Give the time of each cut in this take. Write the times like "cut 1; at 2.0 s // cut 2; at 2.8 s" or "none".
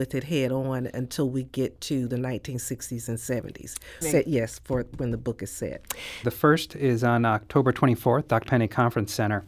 cut 1; at 4.0 s // cut 2; at 6.2 s // cut 3; at 8.5 s

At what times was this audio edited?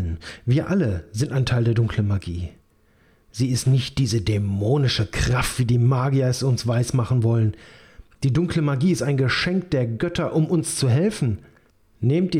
none

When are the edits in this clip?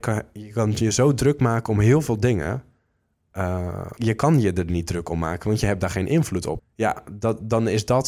cut 1; at 4.0 s // cut 2; at 6.6 s

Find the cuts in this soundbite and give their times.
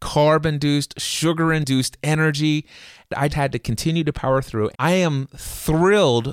cut 1; at 3.3 s // cut 2; at 4.7 s

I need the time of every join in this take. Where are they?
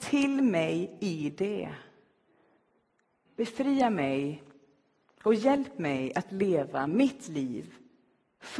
cut 1; at 3.3 s

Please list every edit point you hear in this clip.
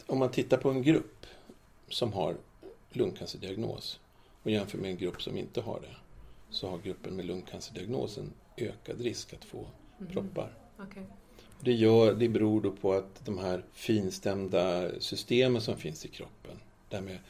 cut 1; at 12.3 s // cut 2; at 13.7 s

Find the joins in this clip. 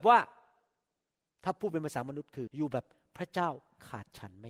cut 1; at 2.5 s

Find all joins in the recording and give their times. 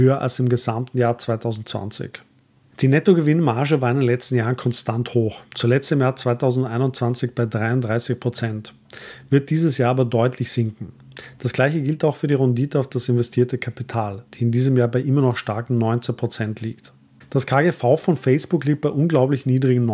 none

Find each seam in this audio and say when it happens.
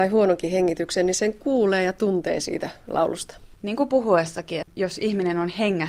cut 1; at 3.5 s // cut 2; at 4.6 s

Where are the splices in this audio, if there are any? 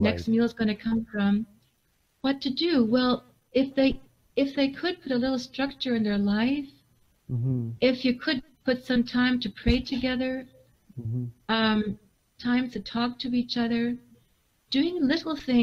none

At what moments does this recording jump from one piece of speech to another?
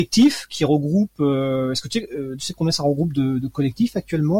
cut 1; at 2.4 s

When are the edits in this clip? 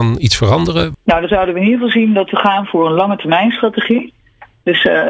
cut 1; at 0.9 s

